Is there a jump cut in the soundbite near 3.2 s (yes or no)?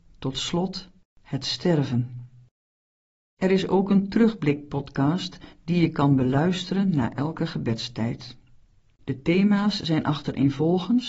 no